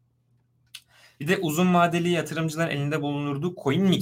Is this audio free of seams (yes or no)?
yes